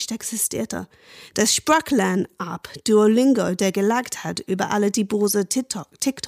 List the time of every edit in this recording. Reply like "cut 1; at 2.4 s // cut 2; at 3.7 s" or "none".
none